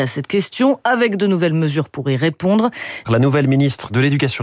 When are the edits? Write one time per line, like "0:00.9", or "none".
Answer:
0:03.0